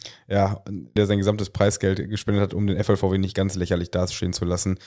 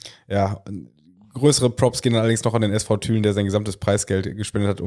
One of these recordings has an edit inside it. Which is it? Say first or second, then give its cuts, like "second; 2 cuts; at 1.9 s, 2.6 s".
first; 1 cut; at 1.0 s